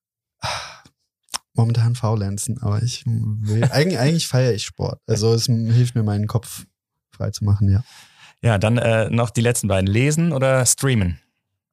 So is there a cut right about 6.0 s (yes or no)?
no